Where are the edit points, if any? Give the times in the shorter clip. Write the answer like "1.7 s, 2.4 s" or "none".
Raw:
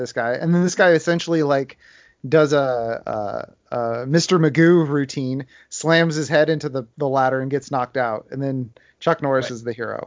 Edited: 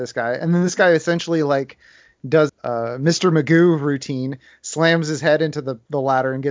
2.5 s